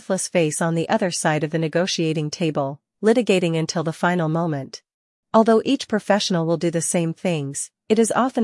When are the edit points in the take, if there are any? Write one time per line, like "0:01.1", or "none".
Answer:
0:05.2

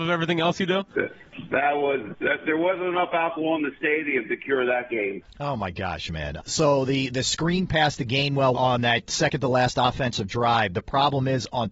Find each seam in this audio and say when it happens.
0:06.4
0:08.5

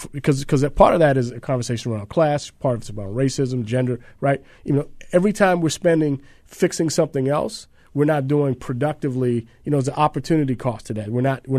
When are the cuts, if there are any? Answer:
0:04.5

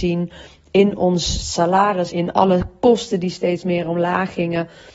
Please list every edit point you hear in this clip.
0:02.1

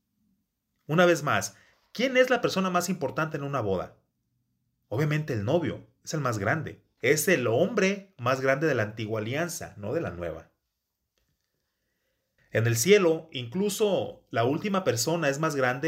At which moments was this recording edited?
0:07.0
0:12.4

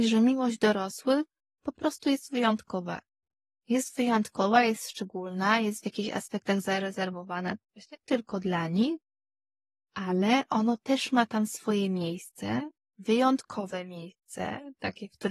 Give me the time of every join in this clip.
none

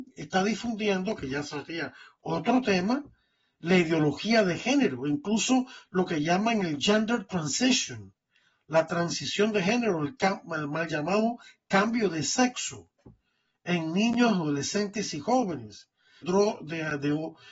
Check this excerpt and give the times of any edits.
0:16.2

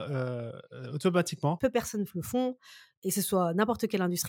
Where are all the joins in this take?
0:01.6

